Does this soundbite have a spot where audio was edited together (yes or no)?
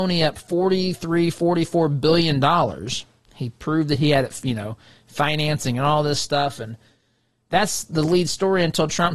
no